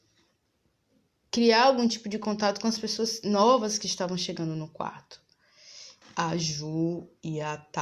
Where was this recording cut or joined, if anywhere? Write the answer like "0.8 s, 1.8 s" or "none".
6.0 s